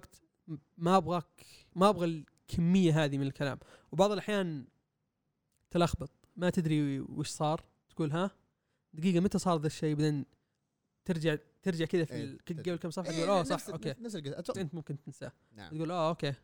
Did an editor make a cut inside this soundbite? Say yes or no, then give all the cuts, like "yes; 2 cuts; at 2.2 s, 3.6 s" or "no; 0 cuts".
yes; 1 cut; at 14.5 s